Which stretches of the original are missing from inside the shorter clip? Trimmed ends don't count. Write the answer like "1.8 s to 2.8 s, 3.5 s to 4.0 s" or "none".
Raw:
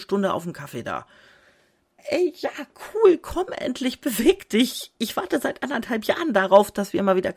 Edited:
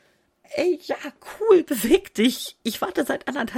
3.2 s to 4.0 s